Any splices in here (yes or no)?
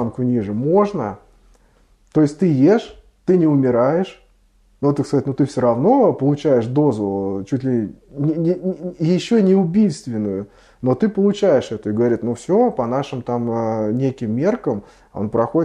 no